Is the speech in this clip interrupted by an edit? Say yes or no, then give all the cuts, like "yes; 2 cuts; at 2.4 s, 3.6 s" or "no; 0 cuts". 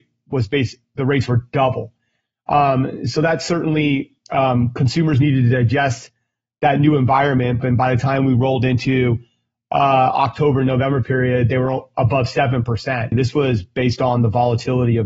yes; 2 cuts; at 7.6 s, 13.1 s